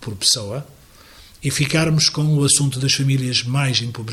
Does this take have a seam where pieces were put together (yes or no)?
no